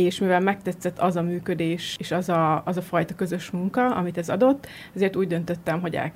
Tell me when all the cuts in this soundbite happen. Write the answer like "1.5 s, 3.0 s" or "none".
none